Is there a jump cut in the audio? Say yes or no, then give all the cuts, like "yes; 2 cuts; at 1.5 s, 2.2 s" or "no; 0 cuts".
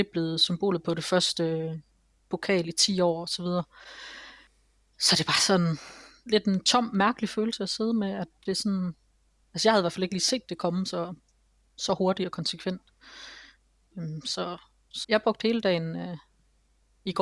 yes; 1 cut; at 15.0 s